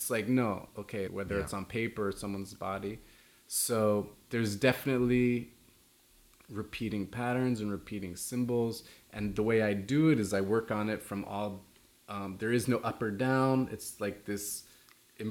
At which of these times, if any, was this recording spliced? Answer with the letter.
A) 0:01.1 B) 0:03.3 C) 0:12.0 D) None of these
A